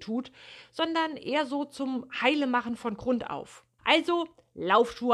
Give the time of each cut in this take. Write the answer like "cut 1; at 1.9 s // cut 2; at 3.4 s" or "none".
cut 1; at 3.8 s